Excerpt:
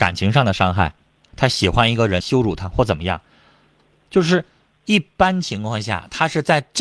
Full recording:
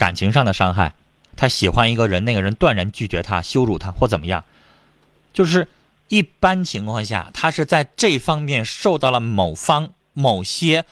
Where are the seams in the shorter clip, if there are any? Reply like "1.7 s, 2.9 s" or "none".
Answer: 2.2 s